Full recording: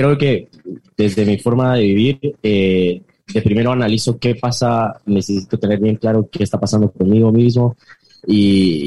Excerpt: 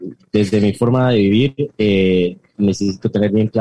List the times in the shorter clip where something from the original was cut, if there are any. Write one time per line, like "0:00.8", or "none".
0:02.5